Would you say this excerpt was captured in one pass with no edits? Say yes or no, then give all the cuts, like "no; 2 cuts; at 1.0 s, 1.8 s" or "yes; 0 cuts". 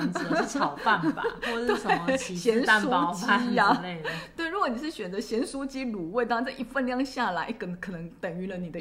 yes; 0 cuts